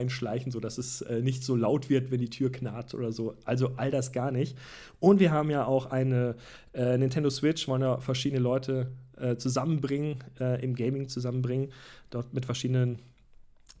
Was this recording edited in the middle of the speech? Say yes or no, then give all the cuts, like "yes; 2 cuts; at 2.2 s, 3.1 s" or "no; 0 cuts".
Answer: no; 0 cuts